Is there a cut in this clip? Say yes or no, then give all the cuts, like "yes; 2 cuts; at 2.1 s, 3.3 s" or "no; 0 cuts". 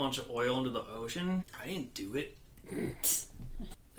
yes; 1 cut; at 1.4 s